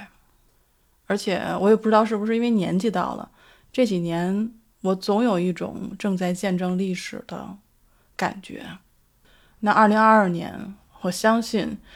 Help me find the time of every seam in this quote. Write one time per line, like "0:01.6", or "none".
none